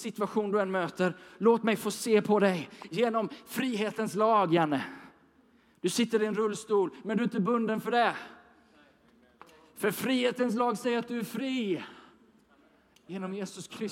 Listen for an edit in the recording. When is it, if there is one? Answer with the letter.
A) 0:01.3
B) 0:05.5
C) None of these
C